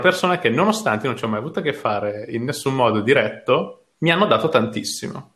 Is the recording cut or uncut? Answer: cut